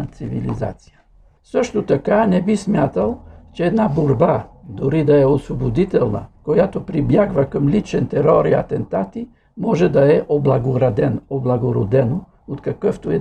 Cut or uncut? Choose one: cut